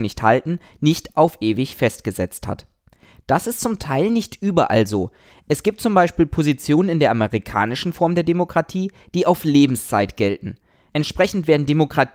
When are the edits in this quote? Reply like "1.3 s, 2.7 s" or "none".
10.9 s